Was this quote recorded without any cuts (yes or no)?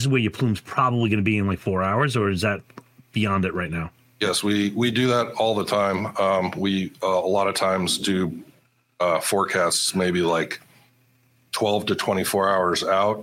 yes